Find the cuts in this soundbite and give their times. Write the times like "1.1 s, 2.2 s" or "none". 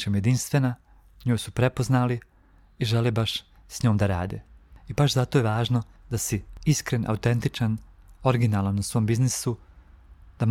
4.7 s

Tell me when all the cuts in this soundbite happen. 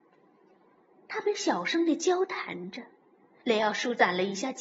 3.4 s

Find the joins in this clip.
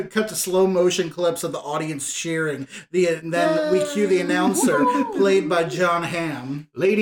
none

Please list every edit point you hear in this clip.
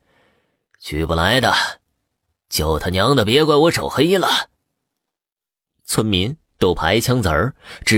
5.7 s

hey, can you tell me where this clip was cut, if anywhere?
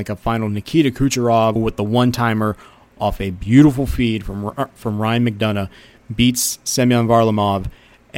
1.6 s

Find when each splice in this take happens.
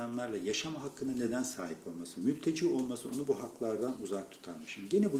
none

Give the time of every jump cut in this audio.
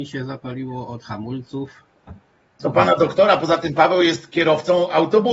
2.6 s

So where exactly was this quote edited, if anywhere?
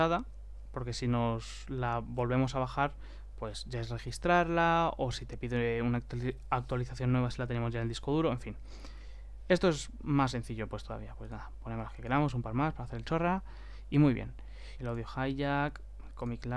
14.8 s

